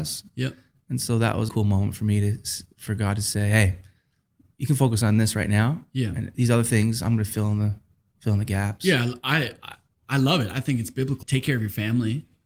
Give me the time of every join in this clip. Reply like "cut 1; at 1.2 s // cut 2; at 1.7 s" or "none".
cut 1; at 1.5 s // cut 2; at 6.3 s // cut 3; at 11.2 s